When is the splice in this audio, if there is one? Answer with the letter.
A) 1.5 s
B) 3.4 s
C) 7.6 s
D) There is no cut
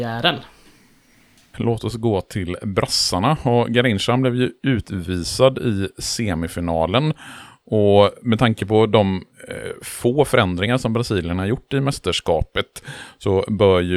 A